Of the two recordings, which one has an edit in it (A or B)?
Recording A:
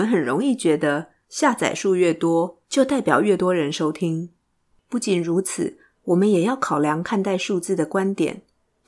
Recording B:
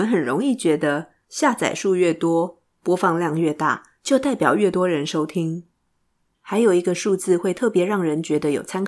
A